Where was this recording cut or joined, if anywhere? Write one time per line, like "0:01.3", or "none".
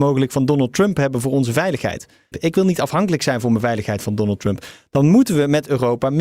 0:02.3